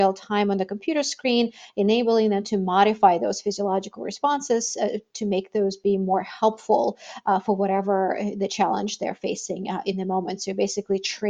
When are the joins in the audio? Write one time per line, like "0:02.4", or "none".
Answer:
none